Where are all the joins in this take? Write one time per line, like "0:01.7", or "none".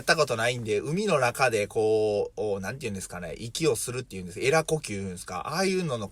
none